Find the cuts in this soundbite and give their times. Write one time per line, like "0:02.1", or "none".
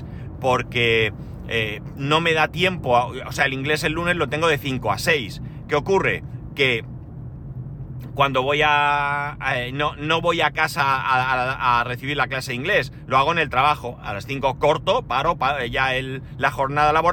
none